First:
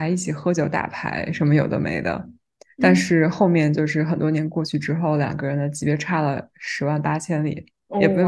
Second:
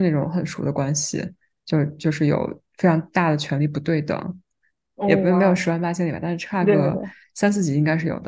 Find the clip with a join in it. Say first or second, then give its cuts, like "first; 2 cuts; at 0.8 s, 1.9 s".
second; 1 cut; at 4.9 s